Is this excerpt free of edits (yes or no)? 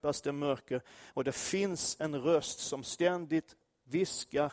yes